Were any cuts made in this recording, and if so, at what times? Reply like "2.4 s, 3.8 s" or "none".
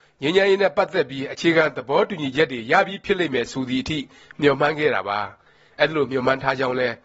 none